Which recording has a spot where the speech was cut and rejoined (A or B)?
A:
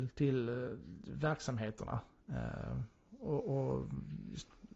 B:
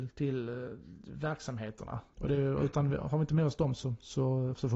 B